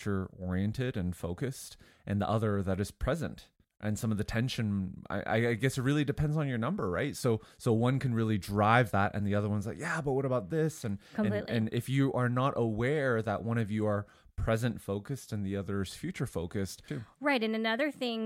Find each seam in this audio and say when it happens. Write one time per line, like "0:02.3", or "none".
0:16.9